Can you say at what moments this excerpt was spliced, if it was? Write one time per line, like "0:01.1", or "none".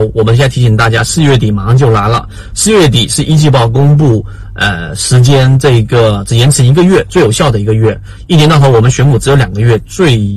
none

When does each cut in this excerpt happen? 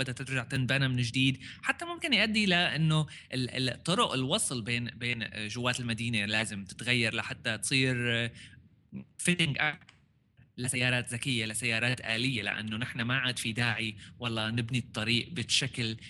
none

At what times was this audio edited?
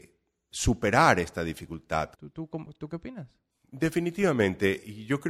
0:02.1

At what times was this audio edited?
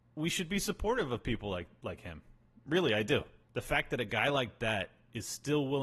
0:03.4

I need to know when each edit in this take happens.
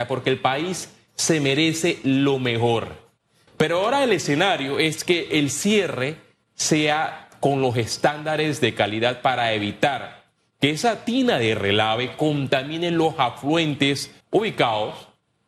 0:03.5
0:14.2

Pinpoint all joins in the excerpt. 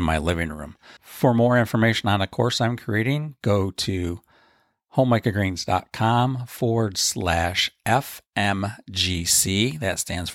0:01.0

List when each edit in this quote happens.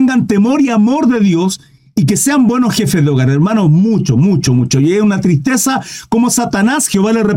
0:04.5

